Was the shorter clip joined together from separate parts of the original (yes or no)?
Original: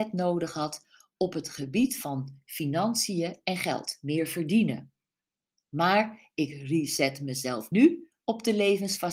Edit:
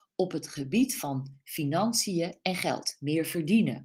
no